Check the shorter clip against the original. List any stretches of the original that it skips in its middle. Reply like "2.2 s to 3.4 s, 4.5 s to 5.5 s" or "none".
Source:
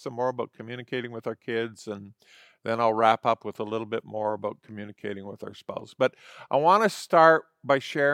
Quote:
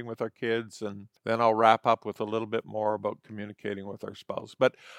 2.2 s to 2.6 s